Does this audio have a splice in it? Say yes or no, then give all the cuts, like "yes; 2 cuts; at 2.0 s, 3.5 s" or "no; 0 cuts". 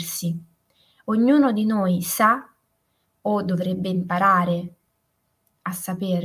no; 0 cuts